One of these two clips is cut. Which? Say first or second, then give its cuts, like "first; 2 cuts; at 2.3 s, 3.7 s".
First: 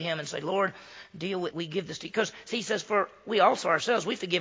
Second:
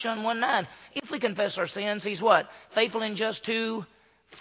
first; 1 cut; at 1.5 s